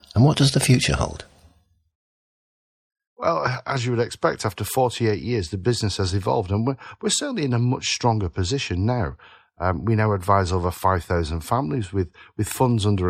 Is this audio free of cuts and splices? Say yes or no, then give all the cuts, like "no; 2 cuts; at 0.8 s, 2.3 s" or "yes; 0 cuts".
yes; 0 cuts